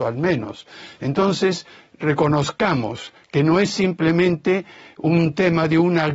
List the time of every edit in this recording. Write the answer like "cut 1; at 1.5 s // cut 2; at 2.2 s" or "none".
none

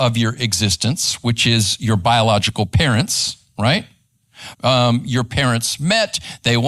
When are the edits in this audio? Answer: cut 1; at 4.5 s

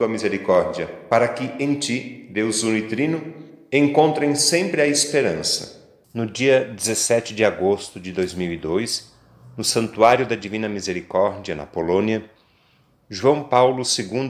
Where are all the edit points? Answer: cut 1; at 6.0 s

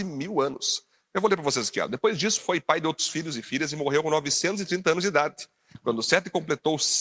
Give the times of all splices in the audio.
cut 1; at 2.4 s

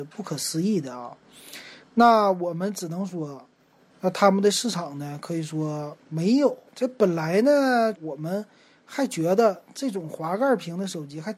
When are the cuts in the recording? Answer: cut 1; at 3.9 s // cut 2; at 6.7 s // cut 3; at 7.9 s

